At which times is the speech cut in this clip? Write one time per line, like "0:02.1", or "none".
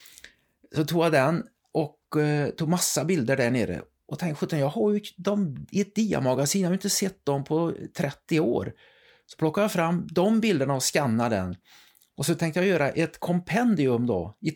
none